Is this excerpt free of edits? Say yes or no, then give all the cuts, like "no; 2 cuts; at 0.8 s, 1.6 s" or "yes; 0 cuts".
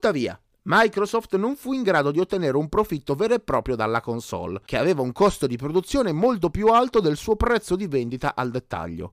yes; 0 cuts